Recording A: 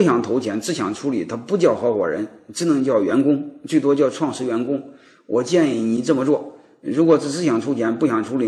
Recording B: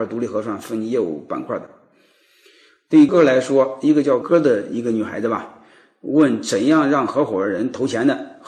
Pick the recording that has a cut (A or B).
B